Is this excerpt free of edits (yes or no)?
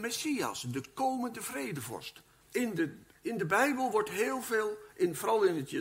no